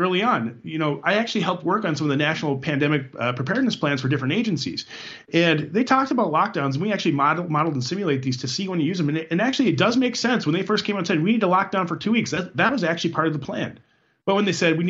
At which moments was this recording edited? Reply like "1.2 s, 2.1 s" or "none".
none